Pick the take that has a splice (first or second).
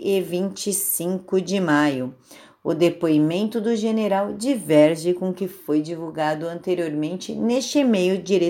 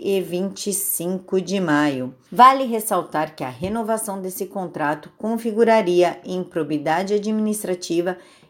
second